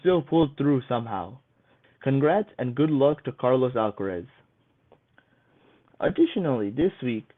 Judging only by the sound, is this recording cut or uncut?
cut